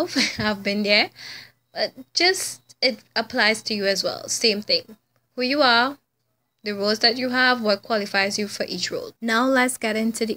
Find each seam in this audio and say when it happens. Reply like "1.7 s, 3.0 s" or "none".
9.2 s